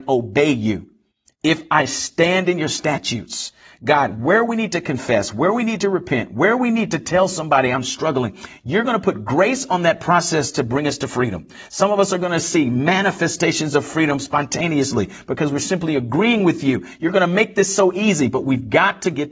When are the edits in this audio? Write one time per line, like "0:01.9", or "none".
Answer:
none